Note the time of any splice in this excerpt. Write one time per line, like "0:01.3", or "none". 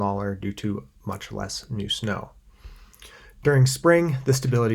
0:01.0